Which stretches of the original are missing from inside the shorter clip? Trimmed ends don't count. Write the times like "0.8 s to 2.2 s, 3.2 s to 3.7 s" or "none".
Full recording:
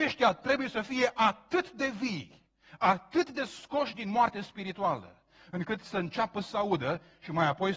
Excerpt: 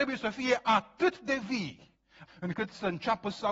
2.8 s to 5.4 s